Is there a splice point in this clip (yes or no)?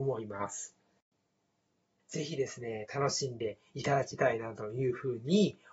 yes